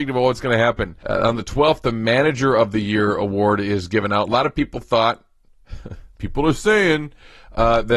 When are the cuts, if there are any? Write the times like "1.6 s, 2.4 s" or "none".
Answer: 1.0 s